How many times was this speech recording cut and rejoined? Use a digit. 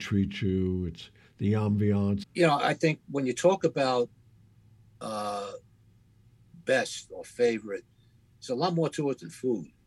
1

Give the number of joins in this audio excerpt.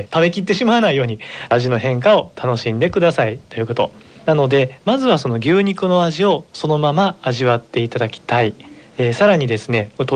1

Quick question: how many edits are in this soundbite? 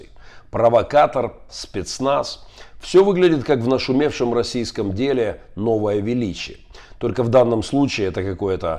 1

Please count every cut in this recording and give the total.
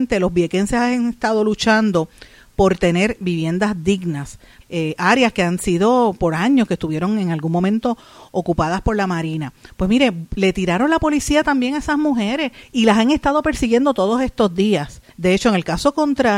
2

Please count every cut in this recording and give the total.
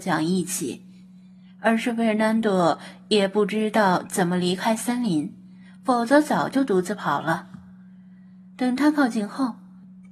0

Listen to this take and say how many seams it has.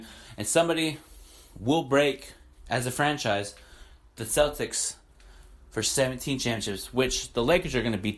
0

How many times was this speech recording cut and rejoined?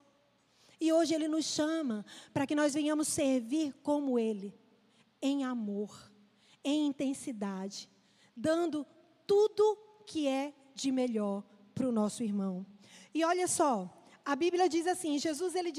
0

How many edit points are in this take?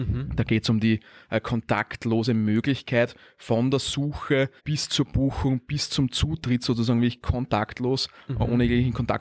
1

